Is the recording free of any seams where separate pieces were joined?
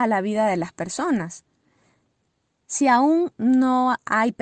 no; 1 cut; at 2.6 s

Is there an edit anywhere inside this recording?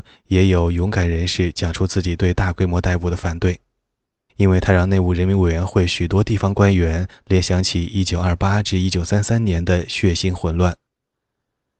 yes; 1 cut; at 4.3 s

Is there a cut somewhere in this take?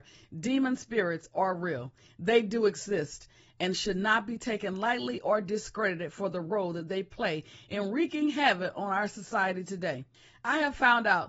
no; 0 cuts

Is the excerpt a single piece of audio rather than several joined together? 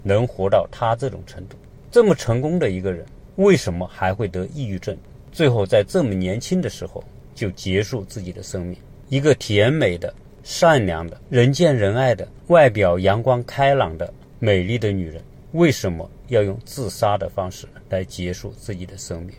yes; 0 cuts

